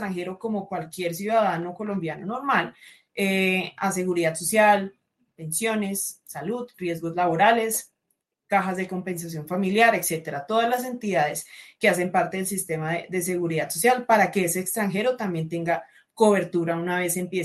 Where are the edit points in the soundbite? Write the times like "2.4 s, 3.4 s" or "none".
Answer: none